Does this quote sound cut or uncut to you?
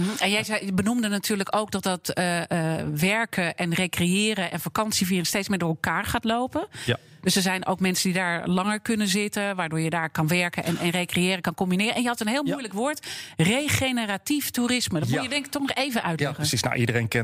uncut